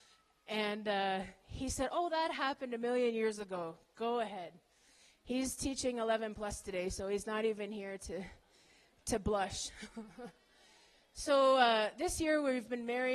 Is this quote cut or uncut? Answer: uncut